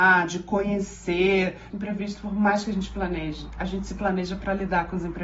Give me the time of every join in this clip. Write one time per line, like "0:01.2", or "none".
0:01.7